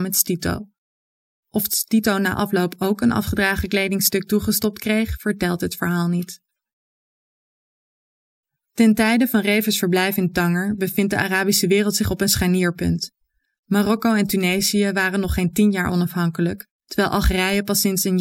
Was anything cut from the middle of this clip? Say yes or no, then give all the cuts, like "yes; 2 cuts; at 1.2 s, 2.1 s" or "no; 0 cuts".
no; 0 cuts